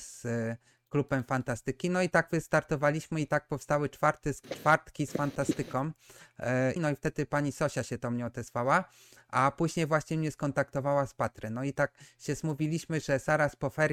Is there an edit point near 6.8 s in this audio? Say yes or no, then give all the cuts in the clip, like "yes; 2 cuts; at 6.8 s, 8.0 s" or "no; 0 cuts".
yes; 1 cut; at 6.8 s